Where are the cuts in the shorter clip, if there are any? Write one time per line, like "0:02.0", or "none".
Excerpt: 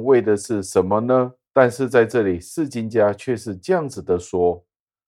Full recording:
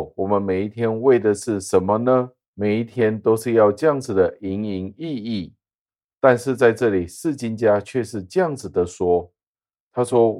0:01.5